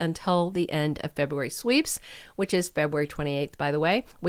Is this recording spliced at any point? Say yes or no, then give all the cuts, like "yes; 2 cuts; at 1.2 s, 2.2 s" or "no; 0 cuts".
no; 0 cuts